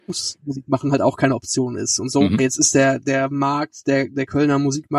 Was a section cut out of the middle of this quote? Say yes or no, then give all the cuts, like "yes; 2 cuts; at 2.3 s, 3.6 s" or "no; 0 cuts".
yes; 1 cut; at 2.4 s